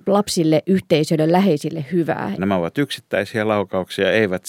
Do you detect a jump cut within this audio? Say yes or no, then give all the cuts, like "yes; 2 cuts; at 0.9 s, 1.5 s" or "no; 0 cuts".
yes; 1 cut; at 2.4 s